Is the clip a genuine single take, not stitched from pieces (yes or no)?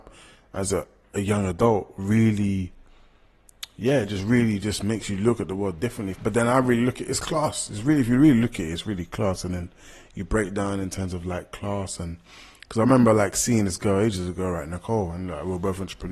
no